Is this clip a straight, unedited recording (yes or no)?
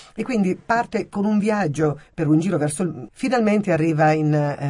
no